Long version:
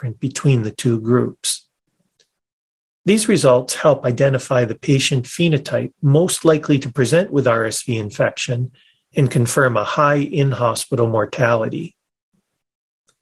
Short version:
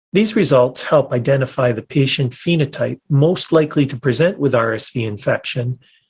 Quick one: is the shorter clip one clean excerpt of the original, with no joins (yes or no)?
yes